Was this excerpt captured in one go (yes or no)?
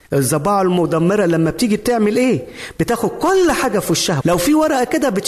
no